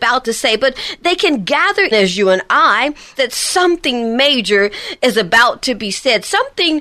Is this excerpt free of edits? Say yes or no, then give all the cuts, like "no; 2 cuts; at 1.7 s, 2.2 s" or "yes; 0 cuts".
no; 2 cuts; at 1.9 s, 3.1 s